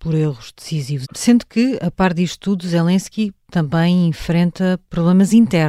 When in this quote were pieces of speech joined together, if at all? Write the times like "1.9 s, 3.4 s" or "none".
1.0 s